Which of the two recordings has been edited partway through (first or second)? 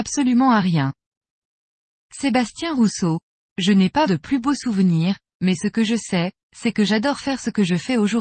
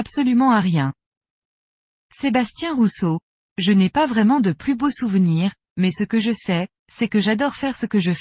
first